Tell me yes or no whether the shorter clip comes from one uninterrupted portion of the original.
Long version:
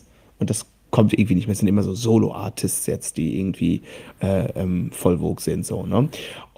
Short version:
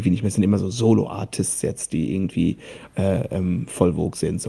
yes